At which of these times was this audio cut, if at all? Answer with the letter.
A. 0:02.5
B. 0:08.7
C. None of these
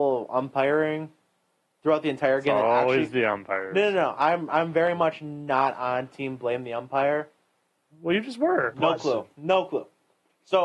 B